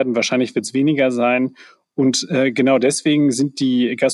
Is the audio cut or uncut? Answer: uncut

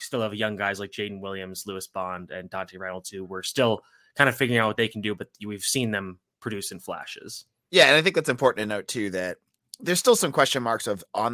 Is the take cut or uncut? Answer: uncut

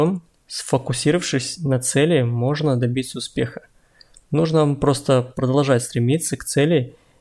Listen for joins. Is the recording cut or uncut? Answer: uncut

